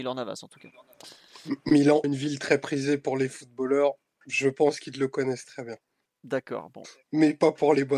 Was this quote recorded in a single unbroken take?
no; 1 cut; at 2.0 s

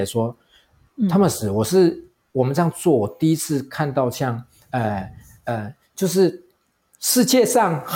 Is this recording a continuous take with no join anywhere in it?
yes; 0 cuts

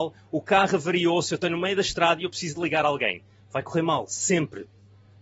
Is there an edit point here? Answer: no; 0 cuts

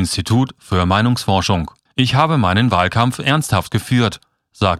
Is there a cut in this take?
yes; 1 cut; at 1.9 s

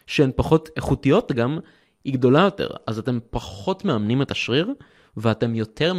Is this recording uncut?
yes; 0 cuts

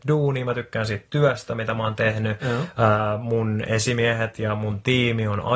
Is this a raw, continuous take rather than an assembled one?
yes; 0 cuts

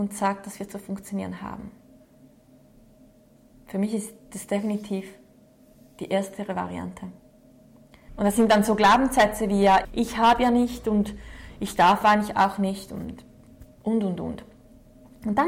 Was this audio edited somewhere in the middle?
yes; 2 cuts; at 8.1 s, 9.8 s

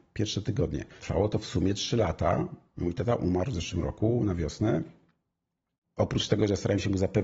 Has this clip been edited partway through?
yes; 1 cut; at 1.0 s

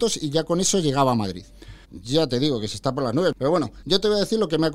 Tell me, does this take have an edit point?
yes; 1 cut; at 1.8 s

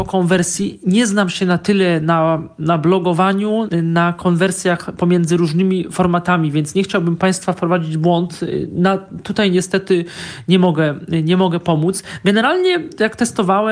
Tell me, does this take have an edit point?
yes; 1 cut; at 3.7 s

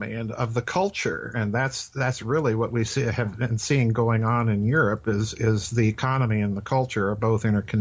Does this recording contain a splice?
no; 0 cuts

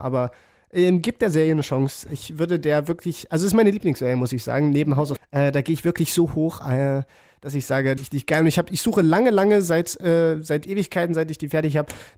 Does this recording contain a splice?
yes; 2 cuts; at 5.2 s, 8.0 s

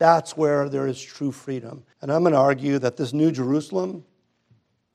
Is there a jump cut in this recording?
yes; 1 cut; at 1.9 s

